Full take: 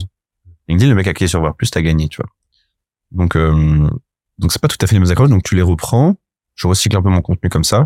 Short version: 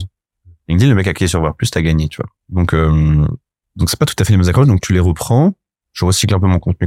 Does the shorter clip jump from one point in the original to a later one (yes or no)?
yes